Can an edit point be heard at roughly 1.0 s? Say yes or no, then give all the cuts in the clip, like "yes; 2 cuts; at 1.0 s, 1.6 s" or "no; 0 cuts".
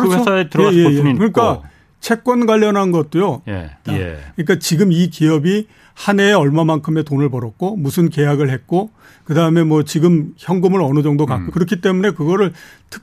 no; 2 cuts; at 3.8 s, 11.5 s